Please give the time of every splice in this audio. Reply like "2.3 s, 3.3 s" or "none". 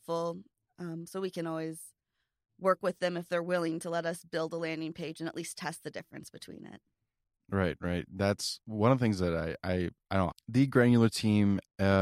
10.3 s